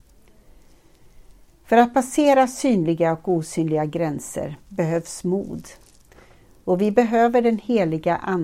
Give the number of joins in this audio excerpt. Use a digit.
0